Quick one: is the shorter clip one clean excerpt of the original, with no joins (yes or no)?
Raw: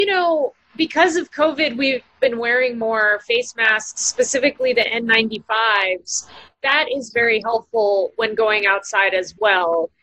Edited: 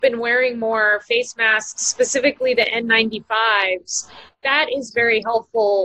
yes